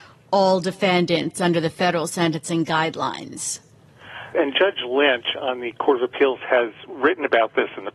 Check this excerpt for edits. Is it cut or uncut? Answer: cut